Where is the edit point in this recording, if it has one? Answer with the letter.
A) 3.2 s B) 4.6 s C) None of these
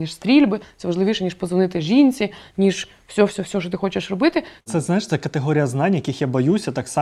B